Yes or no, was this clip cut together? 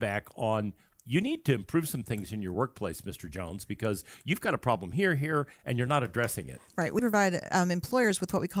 yes